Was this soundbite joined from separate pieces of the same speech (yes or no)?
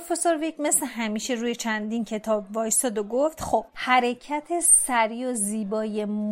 yes